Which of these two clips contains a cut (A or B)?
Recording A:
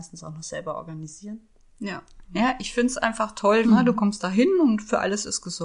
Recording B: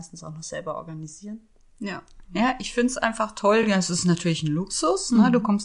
A